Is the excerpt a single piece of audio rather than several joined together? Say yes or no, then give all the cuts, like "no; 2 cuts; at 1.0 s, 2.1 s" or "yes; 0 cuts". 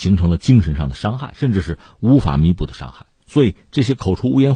no; 1 cut; at 3.2 s